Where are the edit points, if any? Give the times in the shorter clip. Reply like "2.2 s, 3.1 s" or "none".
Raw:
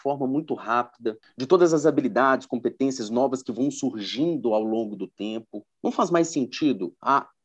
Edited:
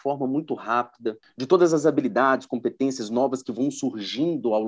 none